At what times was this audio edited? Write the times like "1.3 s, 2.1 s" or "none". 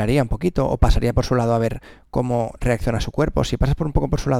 none